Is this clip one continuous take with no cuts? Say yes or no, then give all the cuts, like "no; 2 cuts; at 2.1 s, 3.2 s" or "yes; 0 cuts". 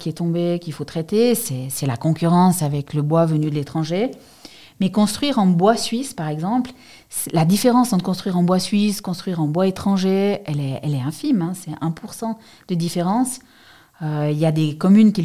yes; 0 cuts